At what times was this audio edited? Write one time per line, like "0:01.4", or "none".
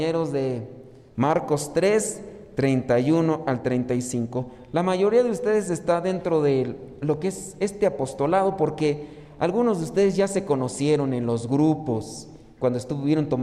0:01.1

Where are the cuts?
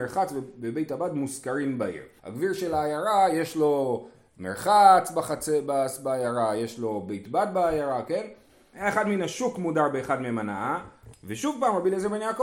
0:02.2
0:08.7
0:11.1

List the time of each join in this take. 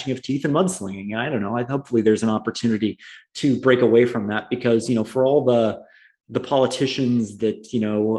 none

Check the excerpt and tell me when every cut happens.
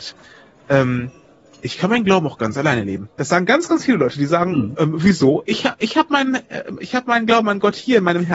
none

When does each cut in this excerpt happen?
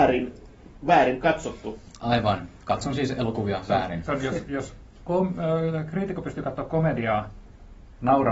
none

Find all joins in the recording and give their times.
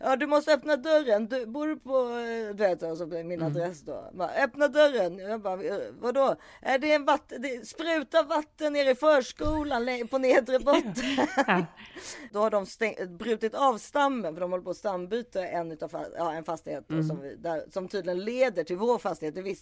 none

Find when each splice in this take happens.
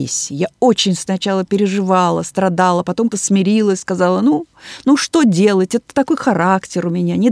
0:03.1

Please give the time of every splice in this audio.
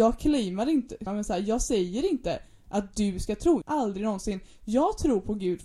0:01.1
0:03.6

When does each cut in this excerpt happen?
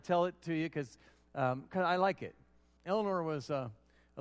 0:02.8

